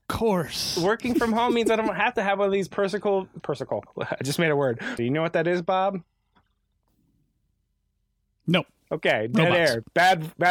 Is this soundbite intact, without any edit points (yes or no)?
no